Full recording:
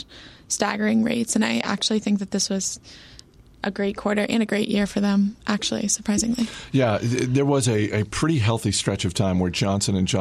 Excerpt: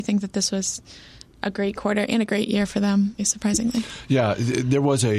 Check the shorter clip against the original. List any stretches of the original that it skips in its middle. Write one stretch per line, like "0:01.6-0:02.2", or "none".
0:03.3-0:03.5
0:05.4-0:05.8